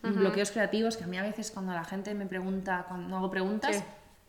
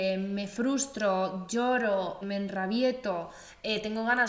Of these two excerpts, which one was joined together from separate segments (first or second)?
second